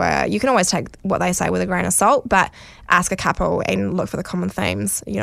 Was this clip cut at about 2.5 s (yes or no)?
no